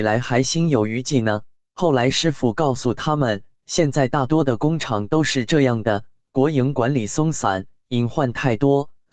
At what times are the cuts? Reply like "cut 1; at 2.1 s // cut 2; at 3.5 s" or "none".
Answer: cut 1; at 6.2 s